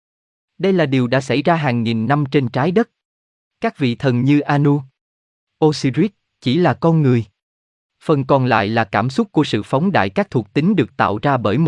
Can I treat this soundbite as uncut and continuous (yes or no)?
yes